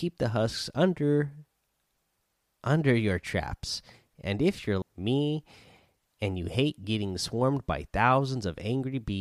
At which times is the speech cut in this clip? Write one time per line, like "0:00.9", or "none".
0:04.8